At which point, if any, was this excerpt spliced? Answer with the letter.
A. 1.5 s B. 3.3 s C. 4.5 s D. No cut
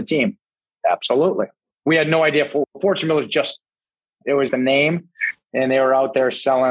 C